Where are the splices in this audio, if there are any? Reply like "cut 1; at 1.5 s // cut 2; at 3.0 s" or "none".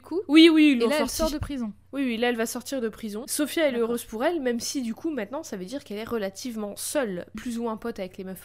cut 1; at 7.3 s